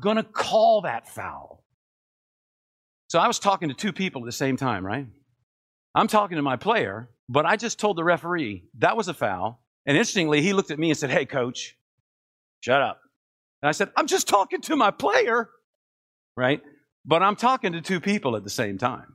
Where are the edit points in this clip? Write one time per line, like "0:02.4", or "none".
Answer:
0:07.2
0:09.7